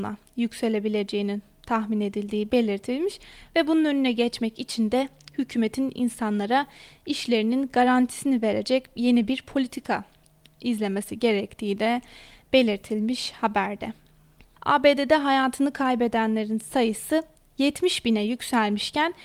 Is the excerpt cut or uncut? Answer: cut